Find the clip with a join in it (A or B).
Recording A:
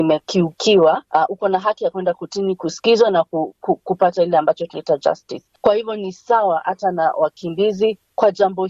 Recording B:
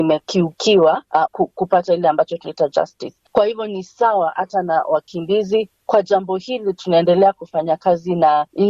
B